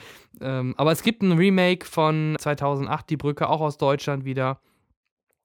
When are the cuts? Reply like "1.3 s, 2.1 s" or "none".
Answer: 2.4 s